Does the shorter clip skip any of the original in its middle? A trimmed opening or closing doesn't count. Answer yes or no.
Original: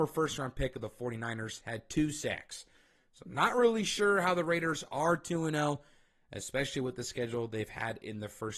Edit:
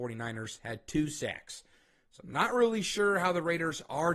no